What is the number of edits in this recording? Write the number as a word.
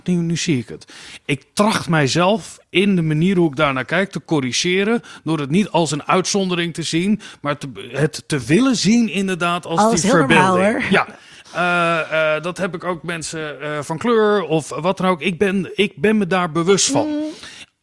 zero